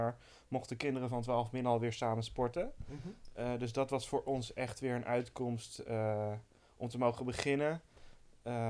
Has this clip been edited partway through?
no; 0 cuts

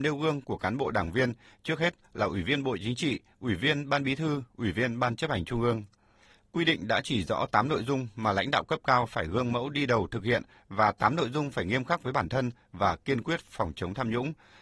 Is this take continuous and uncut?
yes; 0 cuts

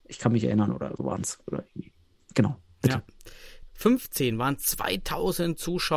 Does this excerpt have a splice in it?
yes; 2 cuts; at 1.0 s, 3.7 s

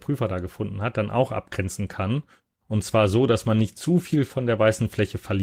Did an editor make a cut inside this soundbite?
no; 0 cuts

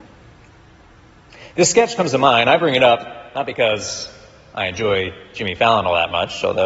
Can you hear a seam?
no; 0 cuts

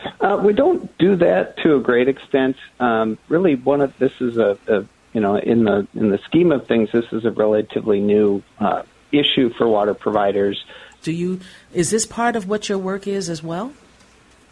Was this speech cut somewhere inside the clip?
yes; 1 cut; at 11.0 s

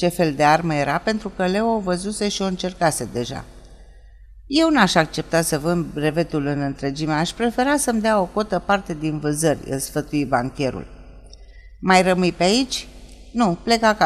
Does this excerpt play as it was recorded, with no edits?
yes; 0 cuts

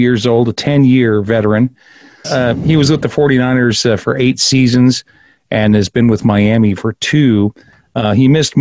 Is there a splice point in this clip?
yes; 1 cut; at 2.2 s

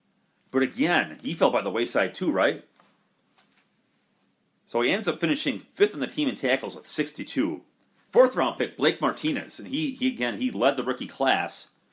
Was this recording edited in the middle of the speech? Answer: yes; 1 cut; at 8.1 s

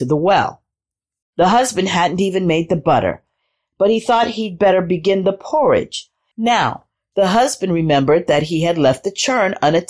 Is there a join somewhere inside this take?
yes; 2 cuts; at 1.2 s, 6.3 s

